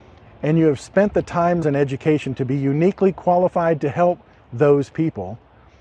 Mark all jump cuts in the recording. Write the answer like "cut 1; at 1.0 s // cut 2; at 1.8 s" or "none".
cut 1; at 1.6 s